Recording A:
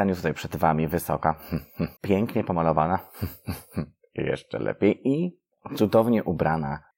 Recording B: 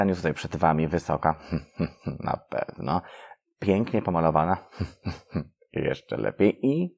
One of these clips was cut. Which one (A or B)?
A